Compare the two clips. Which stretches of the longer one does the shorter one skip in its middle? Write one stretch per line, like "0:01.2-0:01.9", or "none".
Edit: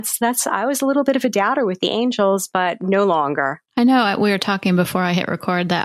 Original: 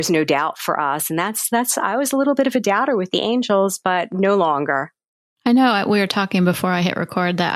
0:05.0-0:05.3